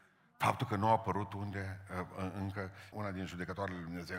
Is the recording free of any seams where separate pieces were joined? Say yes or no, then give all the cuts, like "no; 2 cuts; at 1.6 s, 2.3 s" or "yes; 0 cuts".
no; 1 cut; at 2.9 s